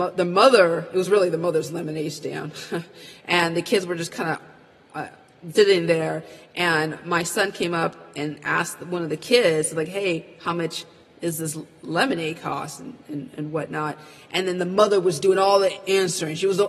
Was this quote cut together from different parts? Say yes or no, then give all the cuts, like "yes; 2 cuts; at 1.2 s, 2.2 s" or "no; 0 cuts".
yes; 1 cut; at 5.5 s